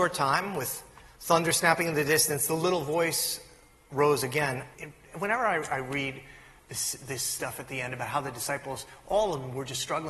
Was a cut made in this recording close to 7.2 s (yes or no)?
no